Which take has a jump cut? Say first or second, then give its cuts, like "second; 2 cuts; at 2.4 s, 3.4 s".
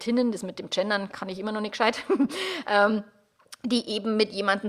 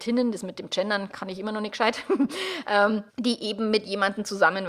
second; 1 cut; at 3.1 s